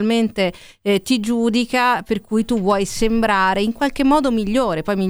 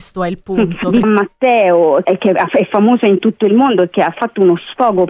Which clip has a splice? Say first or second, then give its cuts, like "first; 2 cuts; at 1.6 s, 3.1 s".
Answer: second; 2 cuts; at 1.0 s, 2.0 s